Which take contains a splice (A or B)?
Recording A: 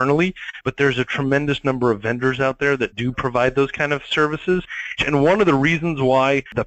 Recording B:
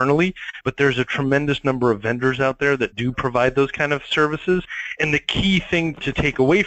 A